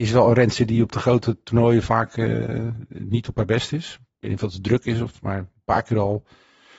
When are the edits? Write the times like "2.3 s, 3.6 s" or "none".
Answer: none